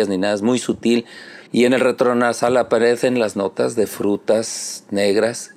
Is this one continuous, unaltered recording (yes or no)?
no